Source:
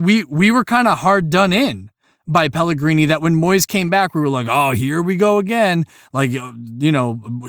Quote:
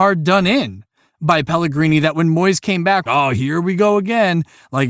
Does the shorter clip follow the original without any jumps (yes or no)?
no